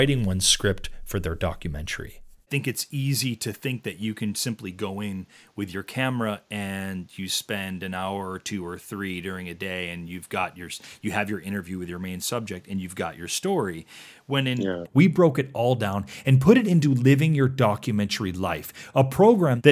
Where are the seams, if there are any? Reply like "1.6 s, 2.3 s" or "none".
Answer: 14.8 s

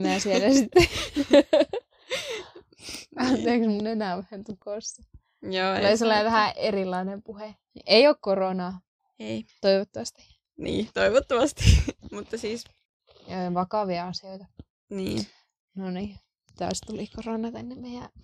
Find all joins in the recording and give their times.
none

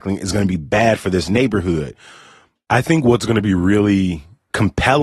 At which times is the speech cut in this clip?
2.6 s

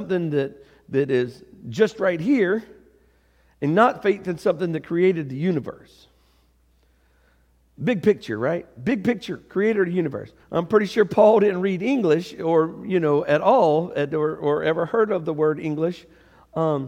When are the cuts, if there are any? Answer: 10.4 s

